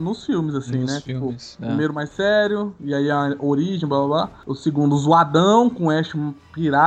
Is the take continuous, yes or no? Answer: yes